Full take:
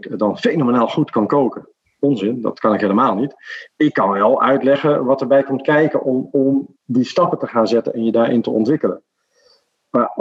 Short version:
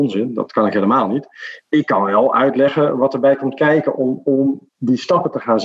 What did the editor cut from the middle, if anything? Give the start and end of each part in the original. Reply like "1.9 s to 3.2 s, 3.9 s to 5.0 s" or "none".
none